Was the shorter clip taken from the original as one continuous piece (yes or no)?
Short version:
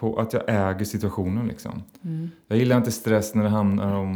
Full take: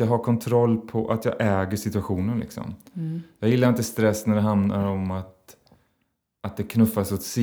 yes